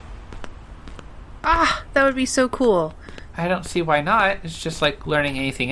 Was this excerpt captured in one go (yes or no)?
no